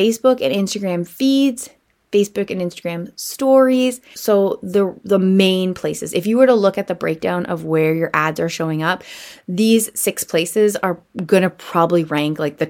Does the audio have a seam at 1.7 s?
no; 1 cut; at 4.1 s

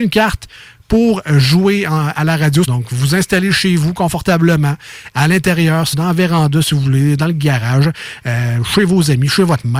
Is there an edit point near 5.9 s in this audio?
yes; 2 cuts; at 2.7 s, 5.9 s

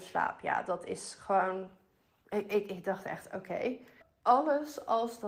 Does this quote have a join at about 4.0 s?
yes; 1 cut; at 4.0 s

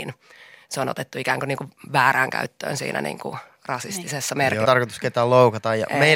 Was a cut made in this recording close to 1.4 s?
no; 1 cut; at 4.6 s

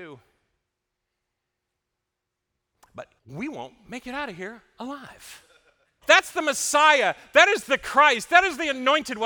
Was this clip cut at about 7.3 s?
no; 2 cuts; at 3.2 s, 6.0 s

